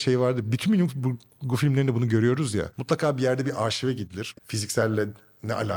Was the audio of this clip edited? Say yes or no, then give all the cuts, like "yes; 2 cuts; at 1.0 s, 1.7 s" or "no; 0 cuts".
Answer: yes; 1 cut; at 4.3 s